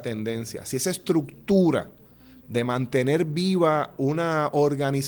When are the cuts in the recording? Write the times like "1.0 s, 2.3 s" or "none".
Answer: none